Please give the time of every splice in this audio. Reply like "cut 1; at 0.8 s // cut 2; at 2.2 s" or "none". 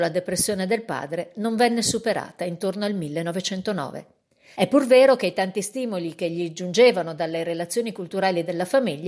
cut 1; at 4.5 s

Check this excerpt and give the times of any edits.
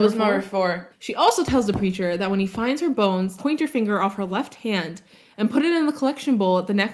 cut 1; at 0.9 s // cut 2; at 3.4 s

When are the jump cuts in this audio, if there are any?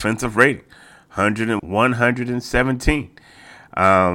cut 1; at 1.6 s

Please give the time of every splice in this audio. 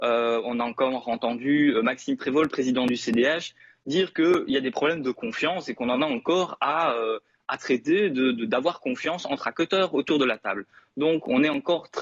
none

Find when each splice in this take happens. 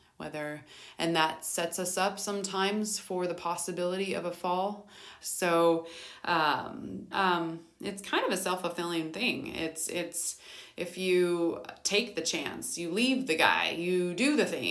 cut 1; at 5.2 s // cut 2; at 7.1 s

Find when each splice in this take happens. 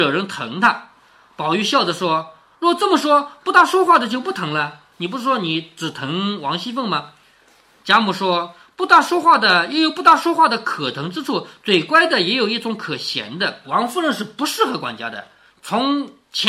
cut 1; at 4.9 s // cut 2; at 13.6 s

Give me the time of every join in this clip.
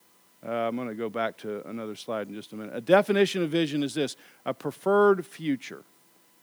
none

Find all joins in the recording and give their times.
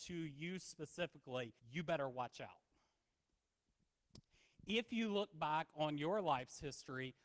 cut 1; at 1.6 s

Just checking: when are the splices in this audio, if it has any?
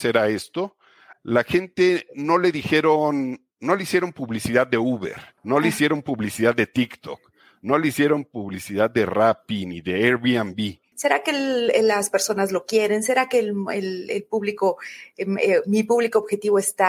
cut 1; at 1.1 s // cut 2; at 5.4 s // cut 3; at 10.9 s

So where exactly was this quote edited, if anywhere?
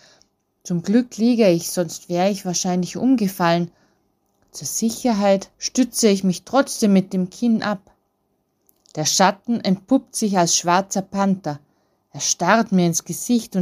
cut 1; at 5.5 s

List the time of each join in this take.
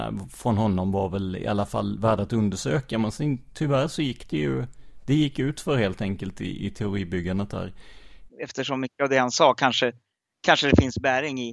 cut 1; at 8.3 s

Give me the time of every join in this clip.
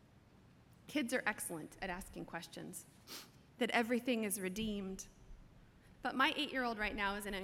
cut 1; at 3.5 s // cut 2; at 5.9 s

